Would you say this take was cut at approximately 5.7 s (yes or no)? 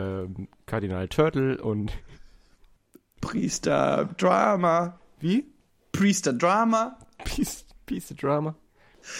no